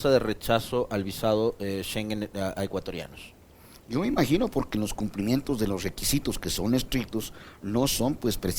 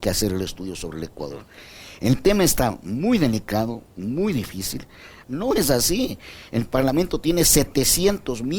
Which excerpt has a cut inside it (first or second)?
second